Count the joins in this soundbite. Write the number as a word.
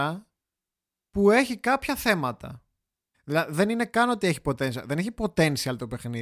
one